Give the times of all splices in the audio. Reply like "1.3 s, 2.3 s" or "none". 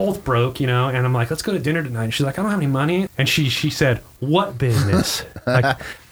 3.1 s